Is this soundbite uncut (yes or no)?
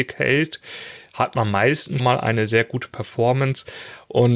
no